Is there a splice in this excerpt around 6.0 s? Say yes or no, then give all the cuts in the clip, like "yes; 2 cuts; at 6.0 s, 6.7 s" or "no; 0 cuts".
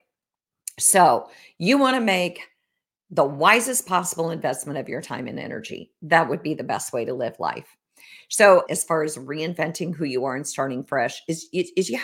no; 1 cut; at 8.7 s